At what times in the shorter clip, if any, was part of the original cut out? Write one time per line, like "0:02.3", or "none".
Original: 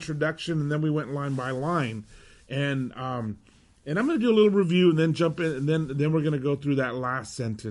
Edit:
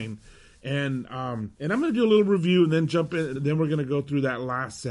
0:01.5
0:03.4